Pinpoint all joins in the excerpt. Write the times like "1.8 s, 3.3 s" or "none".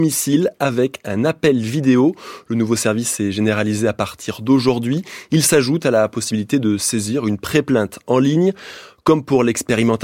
none